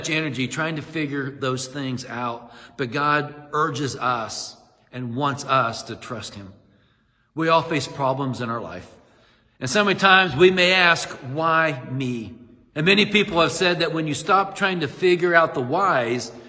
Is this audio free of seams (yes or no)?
no